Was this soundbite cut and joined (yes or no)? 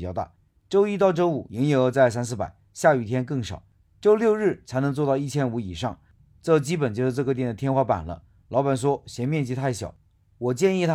no